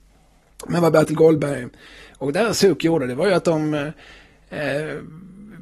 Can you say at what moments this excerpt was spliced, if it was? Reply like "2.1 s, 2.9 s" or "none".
none